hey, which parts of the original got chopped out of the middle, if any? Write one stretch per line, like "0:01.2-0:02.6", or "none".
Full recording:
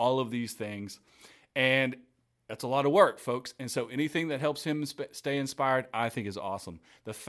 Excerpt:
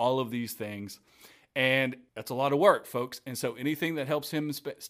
0:02.1-0:02.4

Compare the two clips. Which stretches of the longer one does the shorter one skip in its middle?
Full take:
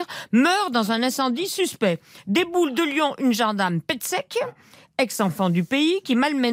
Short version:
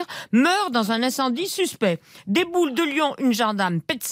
none

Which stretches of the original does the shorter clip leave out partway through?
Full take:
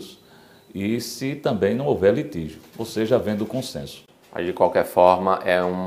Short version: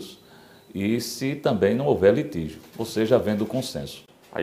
none

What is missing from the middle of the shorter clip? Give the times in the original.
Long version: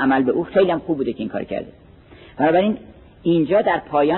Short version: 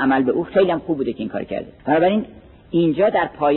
0:01.8-0:02.3

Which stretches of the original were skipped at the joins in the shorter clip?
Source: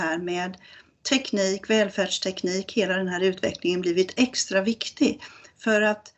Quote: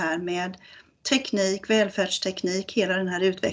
none

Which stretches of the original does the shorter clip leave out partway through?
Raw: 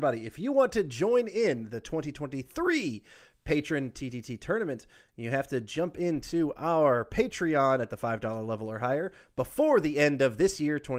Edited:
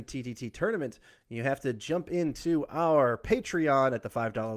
none

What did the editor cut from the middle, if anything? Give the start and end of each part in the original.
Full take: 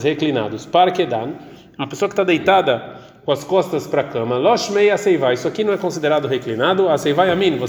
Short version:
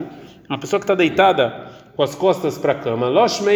none

